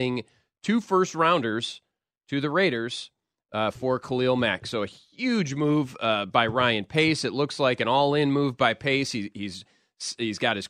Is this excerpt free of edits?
yes; 0 cuts

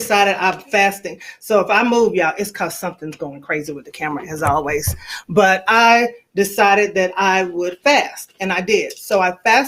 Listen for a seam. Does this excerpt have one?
no; 0 cuts

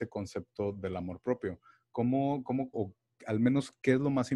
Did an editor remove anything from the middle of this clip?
yes; 1 cut; at 2.7 s

